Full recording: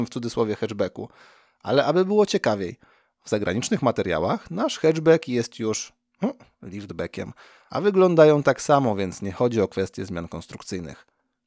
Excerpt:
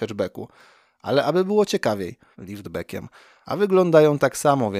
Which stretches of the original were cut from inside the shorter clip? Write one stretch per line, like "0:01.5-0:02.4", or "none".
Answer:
0:02.9-0:06.6